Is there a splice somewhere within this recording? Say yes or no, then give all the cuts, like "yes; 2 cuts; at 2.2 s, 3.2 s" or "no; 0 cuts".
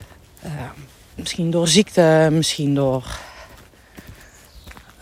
no; 0 cuts